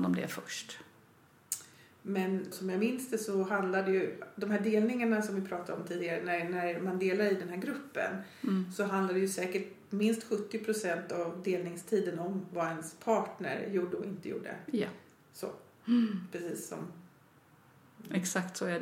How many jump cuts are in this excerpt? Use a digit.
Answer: 1